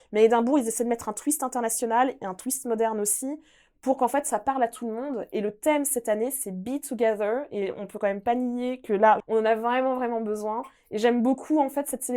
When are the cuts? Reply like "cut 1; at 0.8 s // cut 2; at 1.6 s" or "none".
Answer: cut 1; at 9.2 s